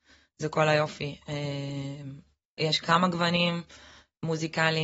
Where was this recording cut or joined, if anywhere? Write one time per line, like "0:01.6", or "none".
0:02.6